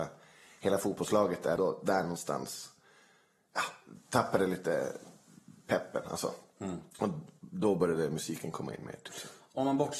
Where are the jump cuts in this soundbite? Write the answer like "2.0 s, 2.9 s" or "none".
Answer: 1.6 s